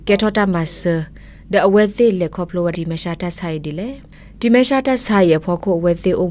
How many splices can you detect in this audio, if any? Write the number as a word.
one